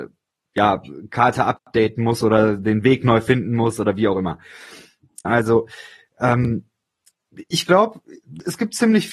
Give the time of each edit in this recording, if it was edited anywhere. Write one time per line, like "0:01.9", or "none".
0:05.2
0:07.5